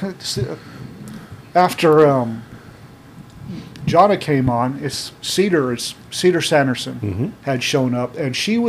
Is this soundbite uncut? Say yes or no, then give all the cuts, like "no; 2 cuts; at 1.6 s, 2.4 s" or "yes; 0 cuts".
yes; 0 cuts